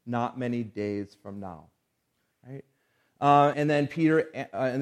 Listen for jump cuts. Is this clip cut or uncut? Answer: cut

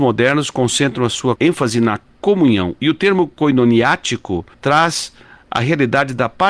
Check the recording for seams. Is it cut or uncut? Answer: cut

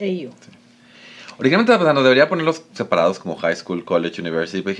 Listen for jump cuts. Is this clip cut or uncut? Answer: uncut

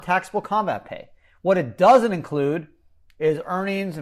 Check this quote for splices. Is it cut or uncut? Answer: uncut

